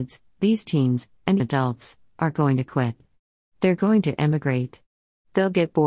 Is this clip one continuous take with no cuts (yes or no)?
no